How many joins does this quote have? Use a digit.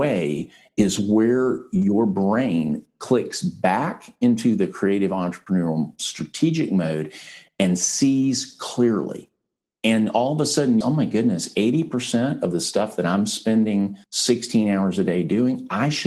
2